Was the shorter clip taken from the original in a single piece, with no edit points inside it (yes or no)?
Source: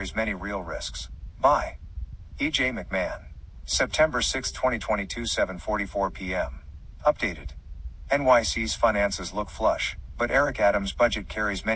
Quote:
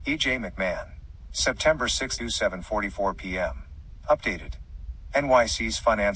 no